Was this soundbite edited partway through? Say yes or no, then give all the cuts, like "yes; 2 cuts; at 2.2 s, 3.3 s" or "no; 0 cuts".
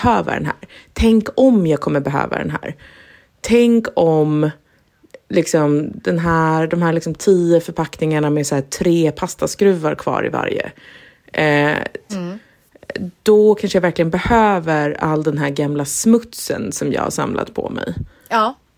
yes; 1 cut; at 12.1 s